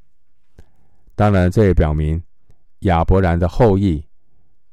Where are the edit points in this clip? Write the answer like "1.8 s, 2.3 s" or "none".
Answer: 1.1 s